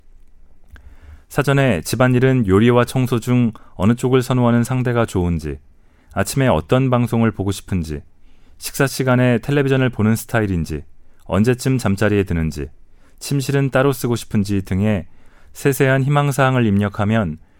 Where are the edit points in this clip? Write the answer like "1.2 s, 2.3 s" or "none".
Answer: none